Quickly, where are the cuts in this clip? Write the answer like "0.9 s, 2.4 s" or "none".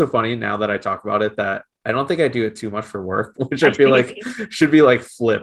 3.3 s